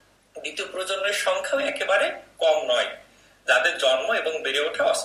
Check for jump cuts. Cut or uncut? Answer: uncut